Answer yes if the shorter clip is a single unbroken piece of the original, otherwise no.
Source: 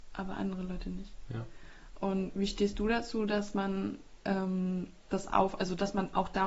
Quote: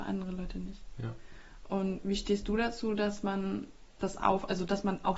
no